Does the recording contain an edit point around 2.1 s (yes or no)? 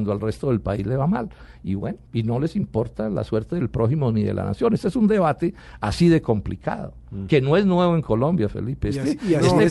yes